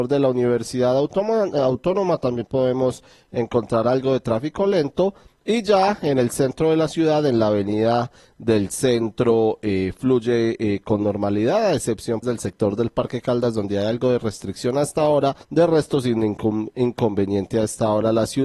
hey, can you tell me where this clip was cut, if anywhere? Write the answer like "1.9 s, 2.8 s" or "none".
12.2 s, 15.4 s